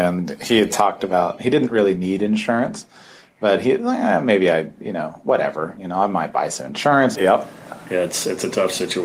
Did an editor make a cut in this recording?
yes; 1 cut; at 7.2 s

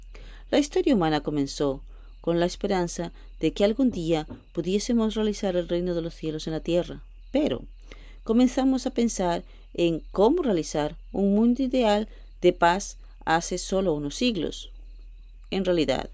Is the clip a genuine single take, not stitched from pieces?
yes; 0 cuts

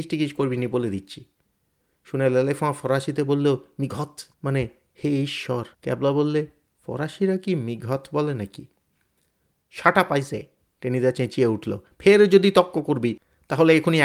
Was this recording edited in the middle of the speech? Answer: yes; 2 cuts; at 4.3 s, 5.7 s

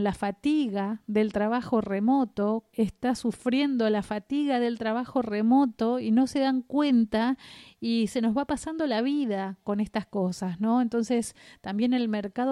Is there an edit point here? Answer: yes; 1 cut; at 2.7 s

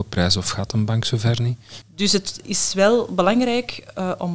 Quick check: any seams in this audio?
yes; 1 cut; at 1.8 s

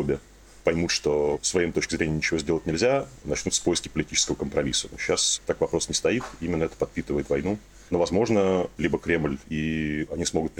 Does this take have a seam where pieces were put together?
yes; 2 cuts; at 7.9 s, 9.4 s

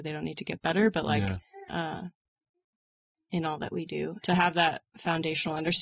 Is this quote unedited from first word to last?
no; 2 cuts; at 1.7 s, 4.2 s

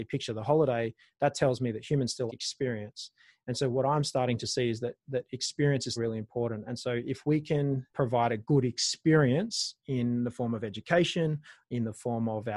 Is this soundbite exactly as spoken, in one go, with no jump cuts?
no; 3 cuts; at 2.3 s, 6.0 s, 7.9 s

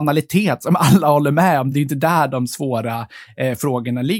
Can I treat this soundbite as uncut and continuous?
yes; 0 cuts

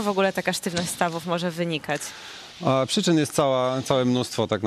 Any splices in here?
no; 0 cuts

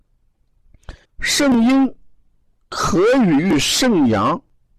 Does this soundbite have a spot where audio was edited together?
yes; 1 cut; at 1.0 s

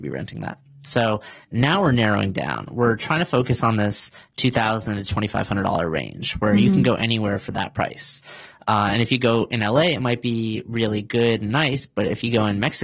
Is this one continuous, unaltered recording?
yes; 0 cuts

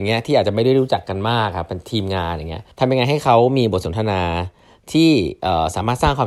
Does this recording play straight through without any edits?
no; 1 cut; at 2.7 s

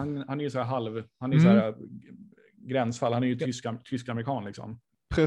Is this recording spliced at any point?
no; 0 cuts

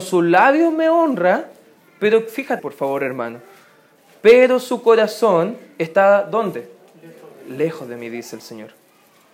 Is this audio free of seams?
no; 1 cut; at 2.6 s

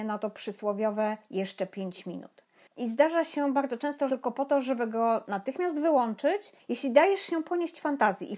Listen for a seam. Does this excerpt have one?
yes; 3 cuts; at 2.7 s, 4.1 s, 6.6 s

